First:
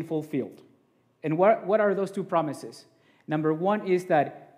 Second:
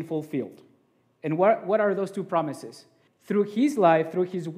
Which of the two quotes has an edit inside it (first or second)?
second